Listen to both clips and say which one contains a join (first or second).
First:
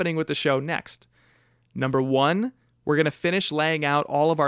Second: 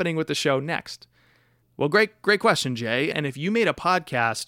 second